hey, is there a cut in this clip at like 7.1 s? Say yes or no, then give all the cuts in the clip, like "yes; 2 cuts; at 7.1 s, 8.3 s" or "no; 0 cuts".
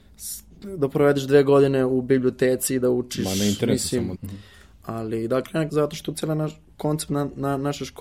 no; 2 cuts; at 4.2 s, 5.7 s